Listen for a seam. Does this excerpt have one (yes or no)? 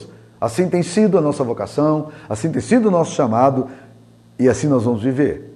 no